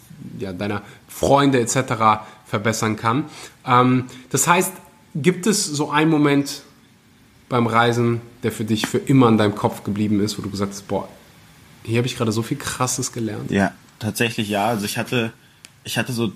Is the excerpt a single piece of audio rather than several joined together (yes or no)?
yes